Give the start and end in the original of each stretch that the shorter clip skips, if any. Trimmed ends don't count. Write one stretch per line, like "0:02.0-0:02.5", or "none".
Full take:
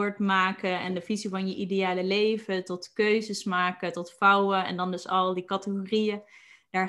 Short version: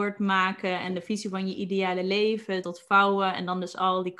0:02.6-0:03.9